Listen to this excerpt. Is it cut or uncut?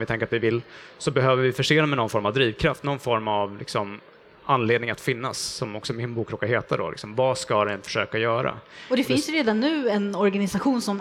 uncut